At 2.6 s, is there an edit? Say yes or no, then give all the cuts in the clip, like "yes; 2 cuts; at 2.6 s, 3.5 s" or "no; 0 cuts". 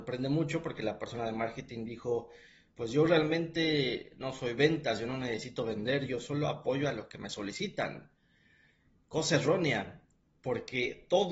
no; 0 cuts